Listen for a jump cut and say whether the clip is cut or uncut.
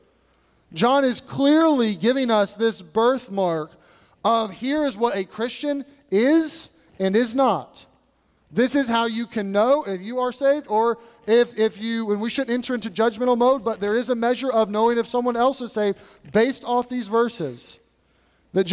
uncut